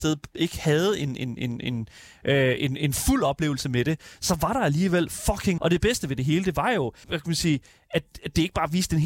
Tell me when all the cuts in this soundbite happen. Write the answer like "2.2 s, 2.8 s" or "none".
5.6 s, 7.0 s